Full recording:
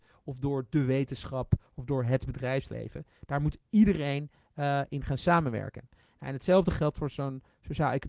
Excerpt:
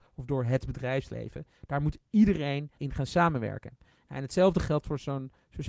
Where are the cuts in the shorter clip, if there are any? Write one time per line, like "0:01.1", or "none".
0:02.8